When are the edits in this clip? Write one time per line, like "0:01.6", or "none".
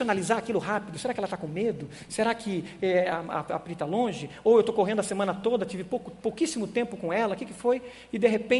none

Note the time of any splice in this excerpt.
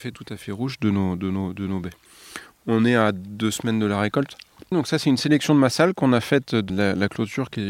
0:04.7
0:06.7

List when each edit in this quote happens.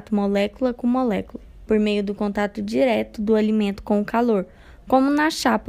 none

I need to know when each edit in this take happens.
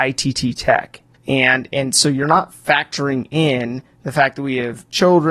0:01.1

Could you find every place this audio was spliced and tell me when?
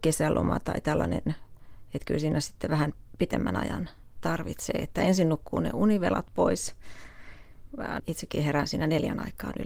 0:08.0

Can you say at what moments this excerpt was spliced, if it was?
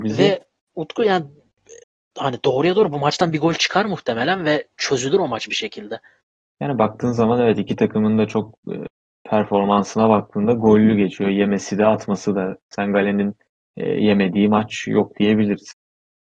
none

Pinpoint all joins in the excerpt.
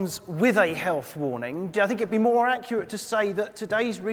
0:01.7

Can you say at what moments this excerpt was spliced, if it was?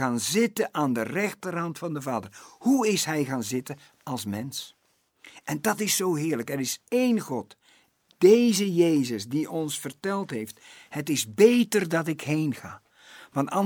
0:08.1

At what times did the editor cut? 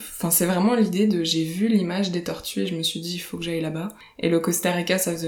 none

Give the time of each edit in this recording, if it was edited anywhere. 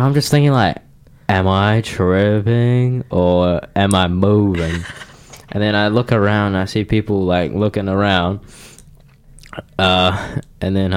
none

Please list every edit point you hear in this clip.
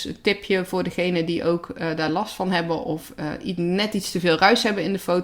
none

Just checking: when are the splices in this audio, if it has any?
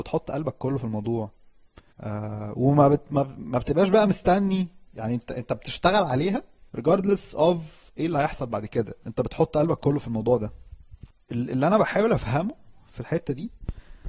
0:06.7
0:09.0

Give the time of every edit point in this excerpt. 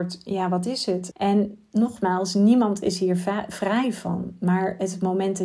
0:01.1

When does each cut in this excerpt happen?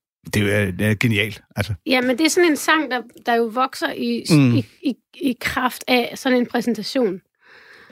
none

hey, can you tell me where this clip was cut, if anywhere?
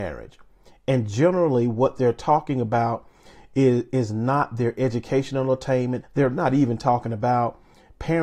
0:06.0

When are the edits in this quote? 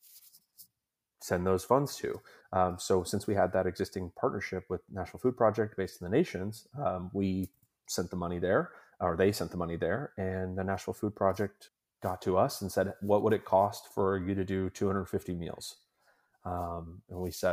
none

